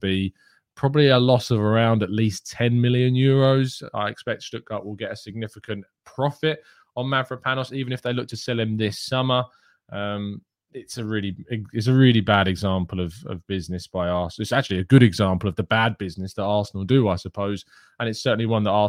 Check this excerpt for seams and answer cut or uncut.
uncut